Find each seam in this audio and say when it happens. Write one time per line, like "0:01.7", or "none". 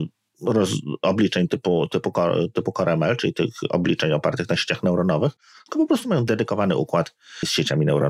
none